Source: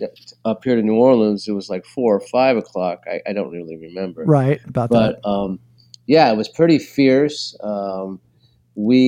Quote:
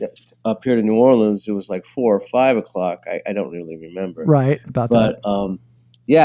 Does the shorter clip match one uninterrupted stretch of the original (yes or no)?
yes